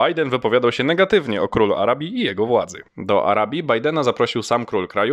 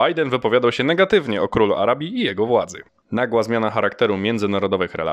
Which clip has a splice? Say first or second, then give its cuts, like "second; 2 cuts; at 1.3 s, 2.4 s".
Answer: first; 1 cut; at 2.9 s